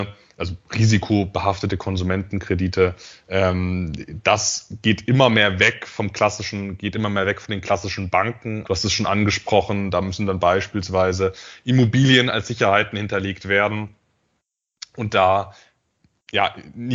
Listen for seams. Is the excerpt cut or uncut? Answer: cut